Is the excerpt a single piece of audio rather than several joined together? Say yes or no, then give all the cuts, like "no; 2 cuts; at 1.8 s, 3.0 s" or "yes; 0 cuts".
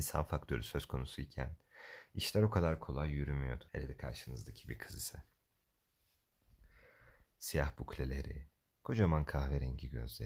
no; 2 cuts; at 3.7 s, 7.4 s